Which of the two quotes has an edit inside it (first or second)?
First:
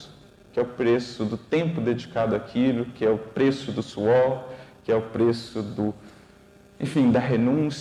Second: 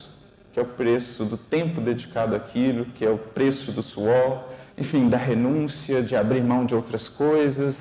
second